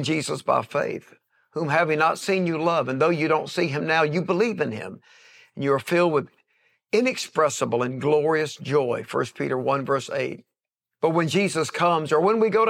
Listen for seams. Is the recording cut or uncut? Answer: uncut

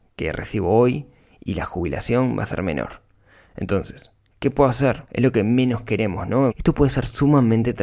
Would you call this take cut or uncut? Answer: cut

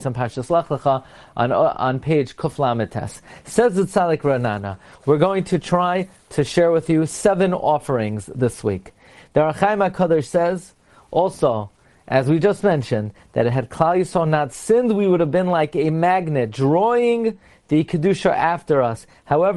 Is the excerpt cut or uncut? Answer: uncut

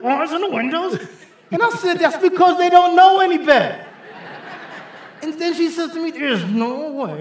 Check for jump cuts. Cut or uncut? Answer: uncut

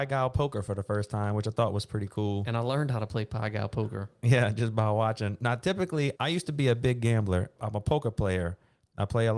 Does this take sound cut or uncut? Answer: cut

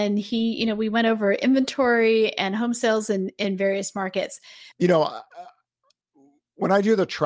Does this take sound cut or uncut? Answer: cut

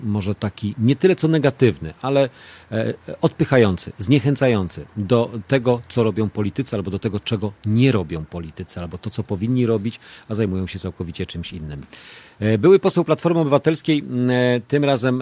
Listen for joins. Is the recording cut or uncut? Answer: uncut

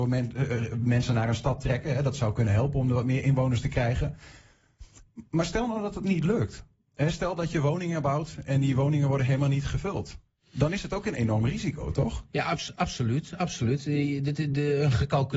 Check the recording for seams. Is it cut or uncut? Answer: uncut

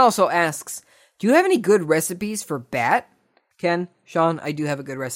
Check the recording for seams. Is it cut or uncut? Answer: cut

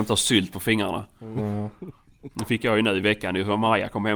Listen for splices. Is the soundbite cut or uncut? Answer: cut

